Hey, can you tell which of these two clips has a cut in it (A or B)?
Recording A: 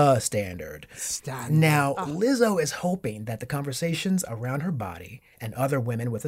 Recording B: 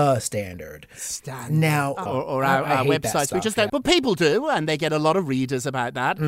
B